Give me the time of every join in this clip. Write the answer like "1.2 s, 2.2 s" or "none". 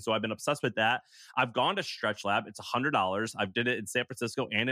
none